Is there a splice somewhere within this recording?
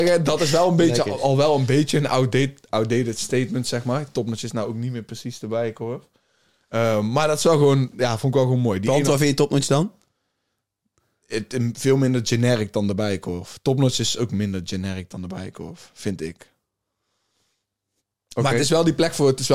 no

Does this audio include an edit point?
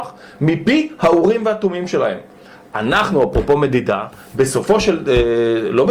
no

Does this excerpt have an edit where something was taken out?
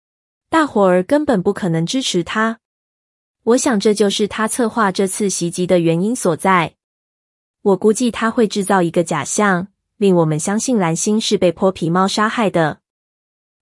no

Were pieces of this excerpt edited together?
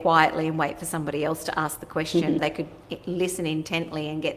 yes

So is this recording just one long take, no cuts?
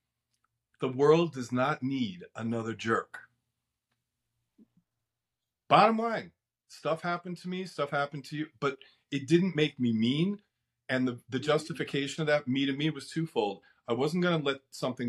yes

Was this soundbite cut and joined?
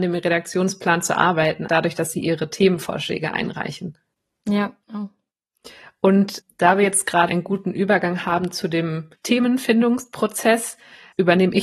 yes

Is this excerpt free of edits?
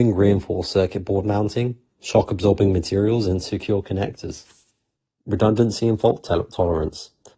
yes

